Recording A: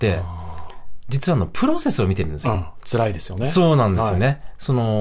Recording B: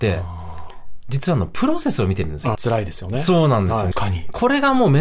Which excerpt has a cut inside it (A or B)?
B